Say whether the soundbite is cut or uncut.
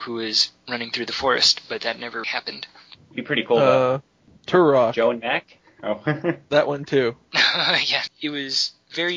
cut